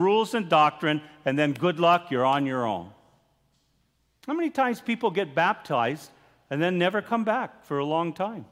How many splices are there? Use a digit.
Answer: 0